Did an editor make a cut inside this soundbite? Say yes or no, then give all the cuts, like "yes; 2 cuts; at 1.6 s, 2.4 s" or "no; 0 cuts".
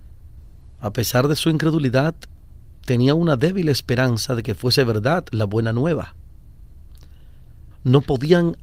yes; 1 cut; at 7.7 s